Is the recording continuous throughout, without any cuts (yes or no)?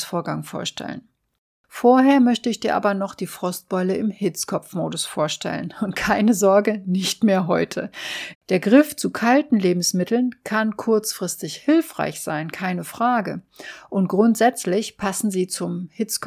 no